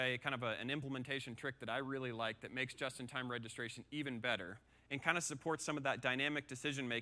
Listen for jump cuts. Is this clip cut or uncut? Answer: uncut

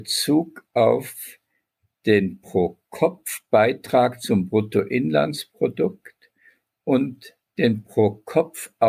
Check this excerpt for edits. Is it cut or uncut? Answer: uncut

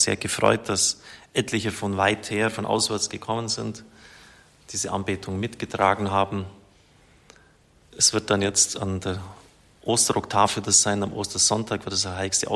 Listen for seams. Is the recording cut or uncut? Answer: uncut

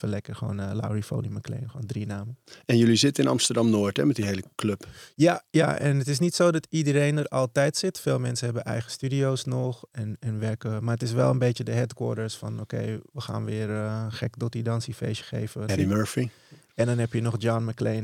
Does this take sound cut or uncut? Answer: cut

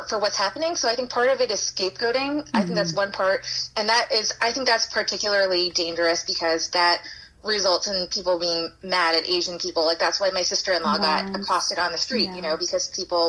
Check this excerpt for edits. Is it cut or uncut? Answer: uncut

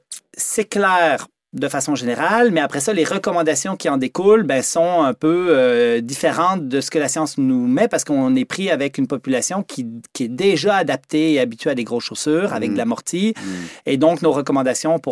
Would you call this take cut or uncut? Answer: uncut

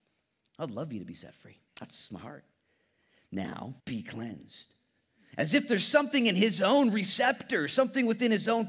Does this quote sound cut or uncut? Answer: cut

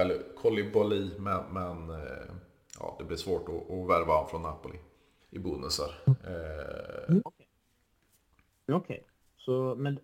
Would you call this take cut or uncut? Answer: cut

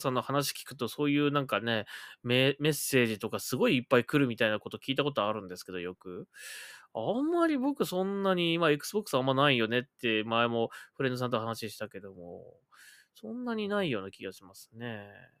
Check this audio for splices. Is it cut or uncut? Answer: uncut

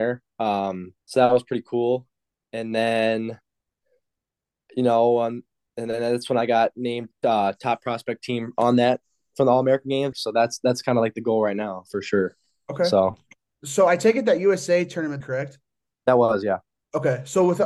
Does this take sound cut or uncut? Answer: cut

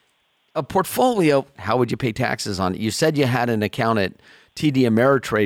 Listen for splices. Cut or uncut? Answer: cut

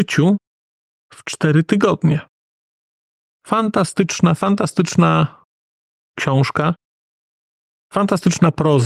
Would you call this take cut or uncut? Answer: uncut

